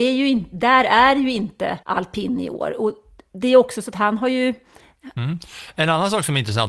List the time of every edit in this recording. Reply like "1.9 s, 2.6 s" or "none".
1.8 s, 5.2 s